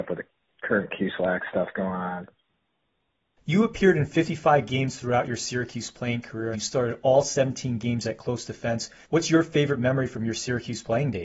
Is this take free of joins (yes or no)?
no